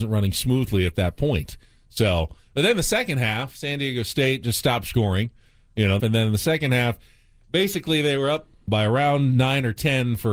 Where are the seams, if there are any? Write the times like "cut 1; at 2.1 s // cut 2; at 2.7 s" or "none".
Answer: cut 1; at 6.0 s // cut 2; at 8.7 s